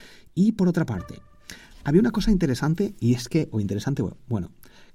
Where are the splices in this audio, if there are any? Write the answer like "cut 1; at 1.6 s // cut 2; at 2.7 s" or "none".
none